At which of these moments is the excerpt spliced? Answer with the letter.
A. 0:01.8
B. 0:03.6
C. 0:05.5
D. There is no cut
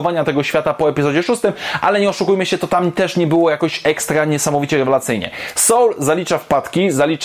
D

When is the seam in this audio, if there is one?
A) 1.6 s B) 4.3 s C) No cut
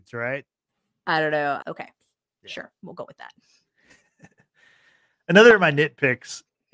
A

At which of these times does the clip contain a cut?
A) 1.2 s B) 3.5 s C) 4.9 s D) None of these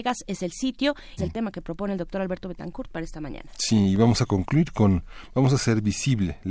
A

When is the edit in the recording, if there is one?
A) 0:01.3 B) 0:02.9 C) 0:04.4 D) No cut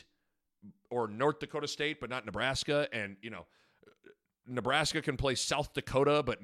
D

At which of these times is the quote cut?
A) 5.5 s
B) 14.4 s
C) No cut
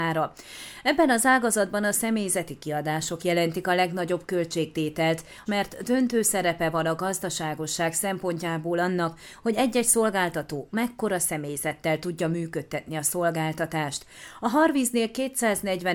A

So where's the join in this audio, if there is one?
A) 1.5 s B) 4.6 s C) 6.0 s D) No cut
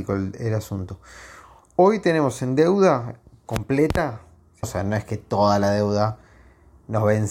B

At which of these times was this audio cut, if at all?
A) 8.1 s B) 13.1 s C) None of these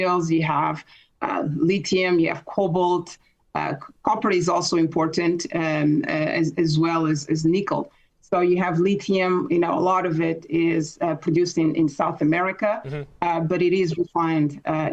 A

